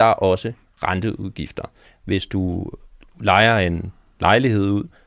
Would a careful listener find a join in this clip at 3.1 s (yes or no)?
no